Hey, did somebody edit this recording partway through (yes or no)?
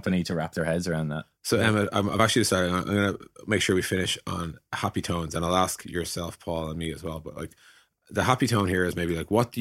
no